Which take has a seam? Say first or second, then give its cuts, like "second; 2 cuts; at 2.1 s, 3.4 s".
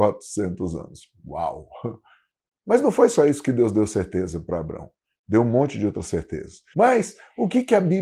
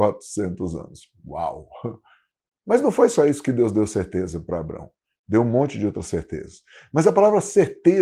first; 1 cut; at 6.7 s